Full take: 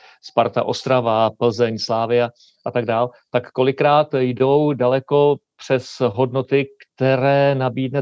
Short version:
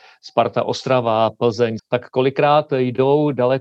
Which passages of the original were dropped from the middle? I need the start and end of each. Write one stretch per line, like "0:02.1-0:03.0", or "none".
0:01.8-0:03.2